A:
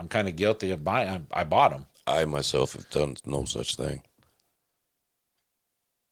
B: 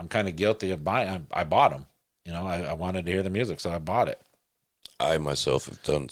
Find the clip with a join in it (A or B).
A